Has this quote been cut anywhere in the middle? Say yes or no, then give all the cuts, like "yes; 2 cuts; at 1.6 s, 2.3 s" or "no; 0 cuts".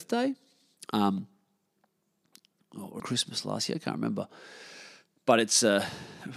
yes; 1 cut; at 3.0 s